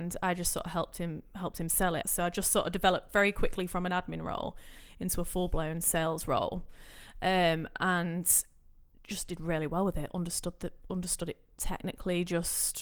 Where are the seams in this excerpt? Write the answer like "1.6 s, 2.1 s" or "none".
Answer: 2.0 s